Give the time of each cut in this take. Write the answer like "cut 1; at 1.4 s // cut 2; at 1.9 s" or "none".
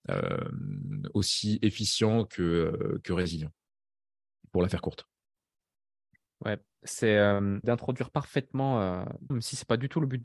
cut 1; at 7.6 s // cut 2; at 9.3 s

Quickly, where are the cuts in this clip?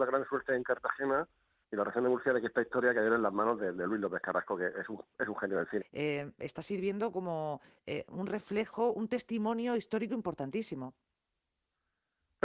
cut 1; at 5.8 s

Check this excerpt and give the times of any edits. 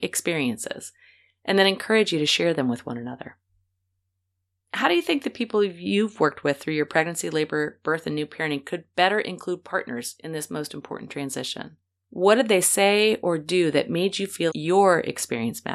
cut 1; at 12.0 s // cut 2; at 14.5 s

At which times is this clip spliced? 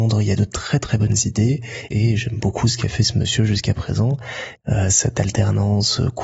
cut 1; at 1.9 s // cut 2; at 4.6 s

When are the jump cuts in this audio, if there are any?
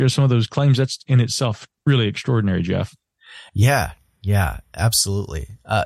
none

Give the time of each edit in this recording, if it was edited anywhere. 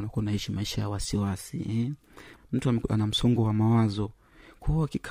cut 1; at 2.4 s

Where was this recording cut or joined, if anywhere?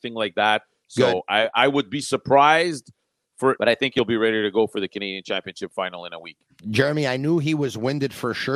cut 1; at 3.6 s

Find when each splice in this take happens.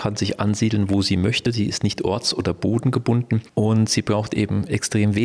none

